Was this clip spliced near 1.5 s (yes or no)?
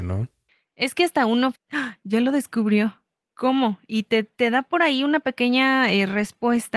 yes